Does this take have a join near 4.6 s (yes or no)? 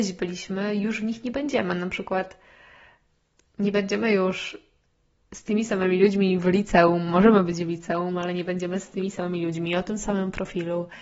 no